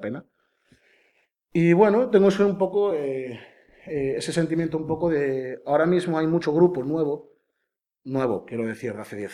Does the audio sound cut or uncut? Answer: uncut